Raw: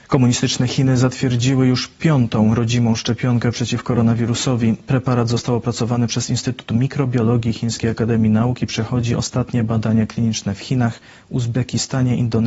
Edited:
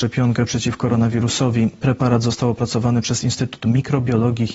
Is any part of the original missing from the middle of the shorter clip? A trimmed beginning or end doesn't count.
no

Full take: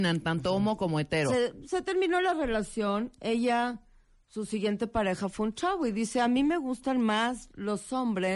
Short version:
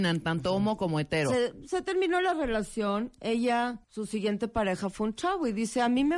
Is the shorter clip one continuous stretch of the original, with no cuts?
no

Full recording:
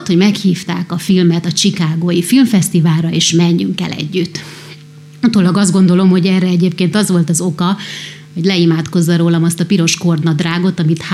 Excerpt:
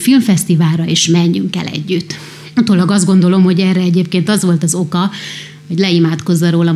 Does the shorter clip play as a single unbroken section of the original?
no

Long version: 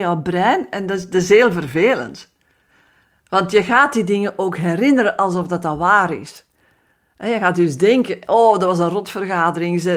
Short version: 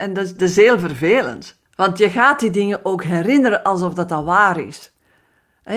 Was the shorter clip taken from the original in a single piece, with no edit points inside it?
no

